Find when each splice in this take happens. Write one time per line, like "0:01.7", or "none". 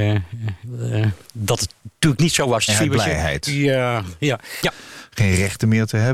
0:02.7
0:04.6